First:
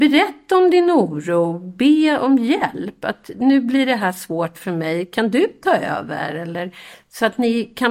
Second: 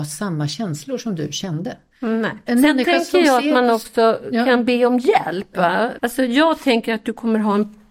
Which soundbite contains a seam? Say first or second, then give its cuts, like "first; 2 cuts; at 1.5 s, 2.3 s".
second; 2 cuts; at 2.5 s, 6.0 s